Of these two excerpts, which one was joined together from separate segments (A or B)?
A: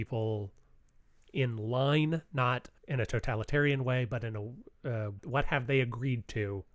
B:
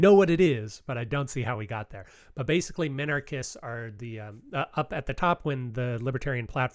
A